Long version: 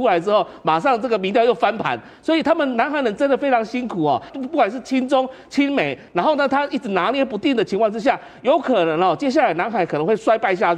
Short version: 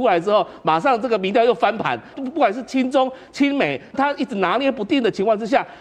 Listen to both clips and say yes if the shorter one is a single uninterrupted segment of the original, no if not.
no